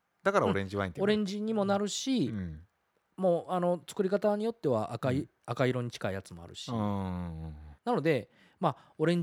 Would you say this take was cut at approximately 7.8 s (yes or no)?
yes